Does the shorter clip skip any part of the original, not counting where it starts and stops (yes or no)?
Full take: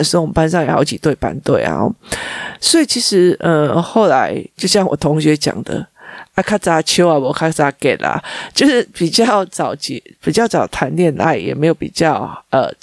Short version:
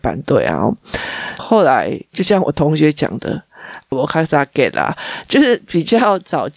yes